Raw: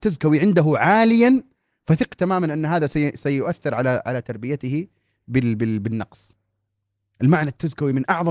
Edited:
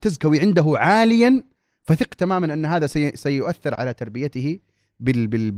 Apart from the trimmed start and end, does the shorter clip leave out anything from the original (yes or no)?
yes